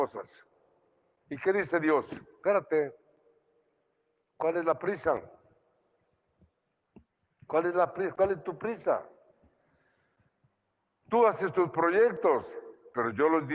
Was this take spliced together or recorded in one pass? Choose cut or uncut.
uncut